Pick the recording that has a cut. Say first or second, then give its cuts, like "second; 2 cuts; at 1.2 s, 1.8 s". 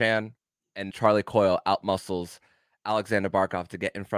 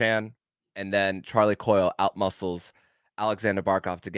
first; 1 cut; at 0.9 s